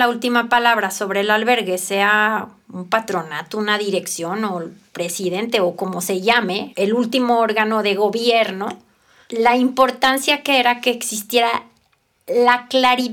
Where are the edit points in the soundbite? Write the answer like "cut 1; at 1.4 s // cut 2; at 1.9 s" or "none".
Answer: cut 1; at 6.7 s